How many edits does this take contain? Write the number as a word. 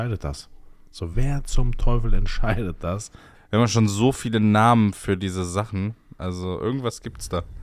two